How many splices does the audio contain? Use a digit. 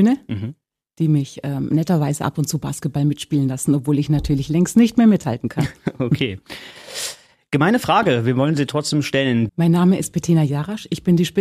1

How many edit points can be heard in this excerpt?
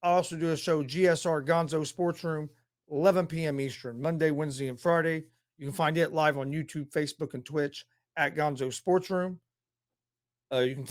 0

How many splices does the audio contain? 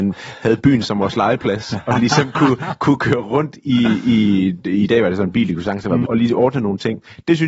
1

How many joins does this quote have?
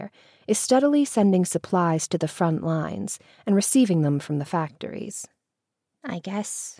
1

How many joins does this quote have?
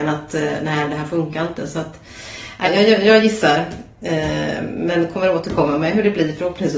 1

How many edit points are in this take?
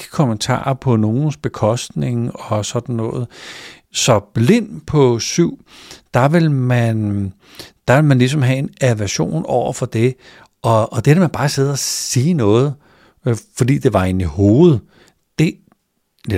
0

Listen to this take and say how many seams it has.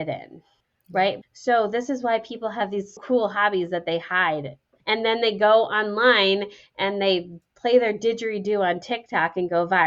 2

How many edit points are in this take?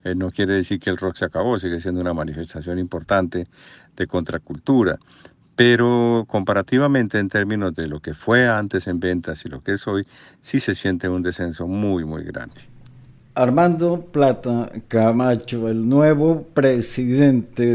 0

